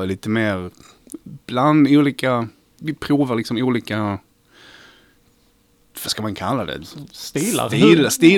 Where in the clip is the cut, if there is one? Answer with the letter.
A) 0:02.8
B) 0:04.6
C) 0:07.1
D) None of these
A